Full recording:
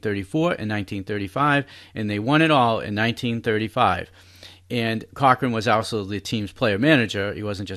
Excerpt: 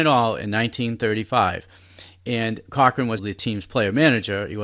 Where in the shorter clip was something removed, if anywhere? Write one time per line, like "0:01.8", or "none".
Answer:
0:03.2